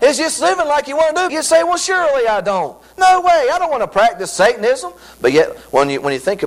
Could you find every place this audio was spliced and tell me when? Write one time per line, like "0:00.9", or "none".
0:01.3